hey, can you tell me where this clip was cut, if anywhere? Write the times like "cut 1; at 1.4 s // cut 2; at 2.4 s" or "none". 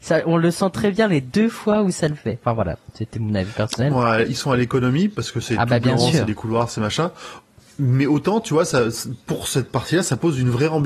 cut 1; at 3.9 s